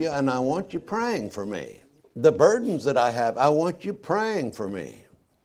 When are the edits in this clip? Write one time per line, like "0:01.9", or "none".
none